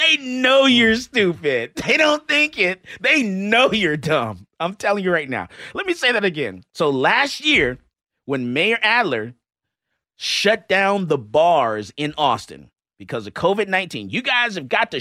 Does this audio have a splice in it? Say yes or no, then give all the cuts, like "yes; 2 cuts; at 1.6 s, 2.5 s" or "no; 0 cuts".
no; 0 cuts